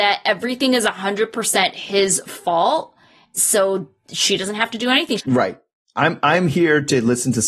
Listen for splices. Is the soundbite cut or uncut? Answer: cut